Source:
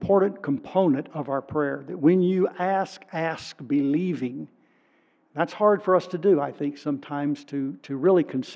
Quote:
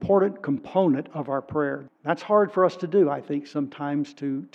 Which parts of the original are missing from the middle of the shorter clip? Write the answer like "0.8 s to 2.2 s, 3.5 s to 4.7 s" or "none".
1.9 s to 5.2 s